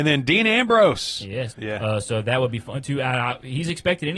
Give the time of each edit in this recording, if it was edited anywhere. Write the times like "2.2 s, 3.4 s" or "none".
1.5 s